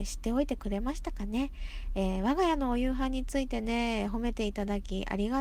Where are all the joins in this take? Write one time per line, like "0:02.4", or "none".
none